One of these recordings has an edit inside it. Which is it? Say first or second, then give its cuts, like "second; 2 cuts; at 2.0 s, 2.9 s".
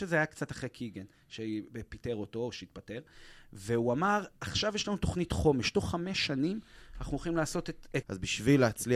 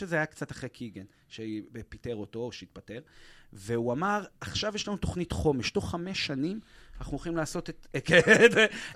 first; 1 cut; at 8.0 s